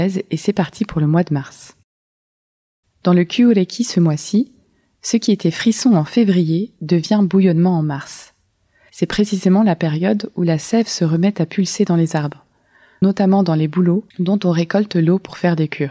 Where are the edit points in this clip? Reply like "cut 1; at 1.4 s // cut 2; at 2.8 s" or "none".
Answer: cut 1; at 8.9 s